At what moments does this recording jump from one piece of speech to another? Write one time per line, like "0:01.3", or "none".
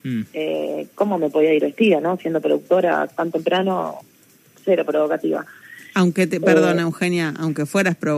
none